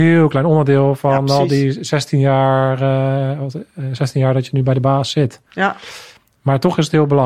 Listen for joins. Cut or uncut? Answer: uncut